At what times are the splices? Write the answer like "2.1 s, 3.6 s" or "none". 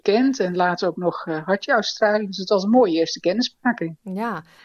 none